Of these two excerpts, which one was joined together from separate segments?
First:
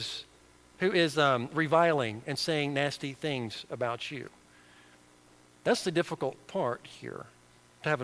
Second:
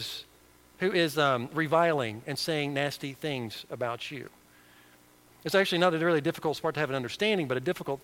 second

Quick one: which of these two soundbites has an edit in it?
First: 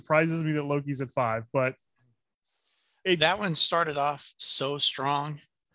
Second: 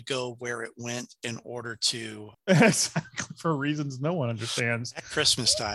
second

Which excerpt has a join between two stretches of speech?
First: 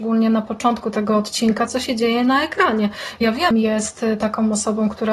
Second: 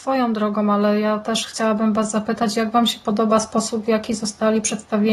first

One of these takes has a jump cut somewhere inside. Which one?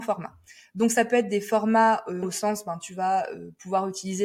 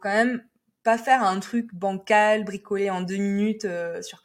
first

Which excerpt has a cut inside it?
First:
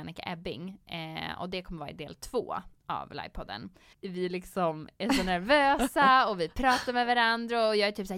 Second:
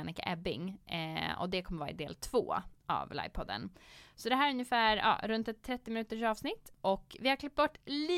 first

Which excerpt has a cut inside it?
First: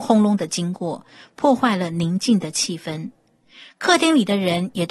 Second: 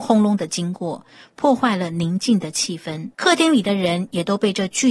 second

